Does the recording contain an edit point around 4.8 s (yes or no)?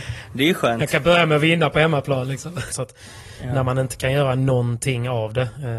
no